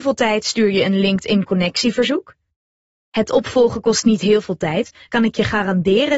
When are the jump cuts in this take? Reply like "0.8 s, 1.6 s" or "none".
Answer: 5.1 s